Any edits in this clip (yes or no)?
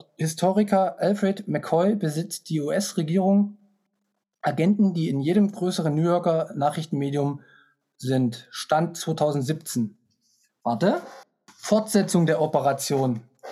no